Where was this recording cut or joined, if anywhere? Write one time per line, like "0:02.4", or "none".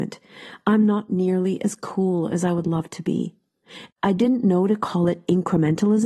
0:03.9

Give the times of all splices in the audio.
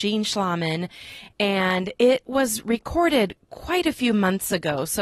none

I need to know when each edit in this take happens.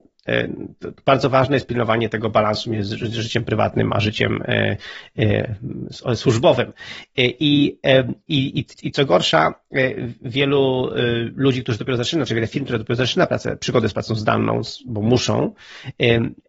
0:08.7

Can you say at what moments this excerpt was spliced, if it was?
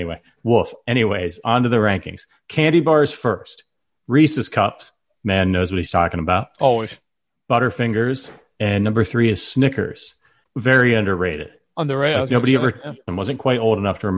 0:10.4
0:13.1

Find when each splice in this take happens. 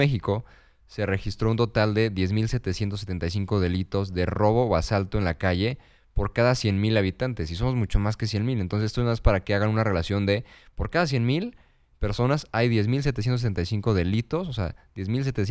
none

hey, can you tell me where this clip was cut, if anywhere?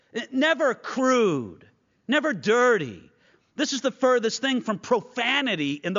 none

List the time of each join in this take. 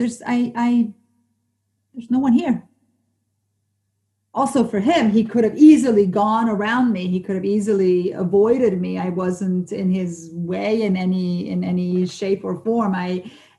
none

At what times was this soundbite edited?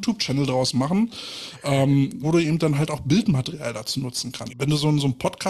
0:02.2
0:04.5

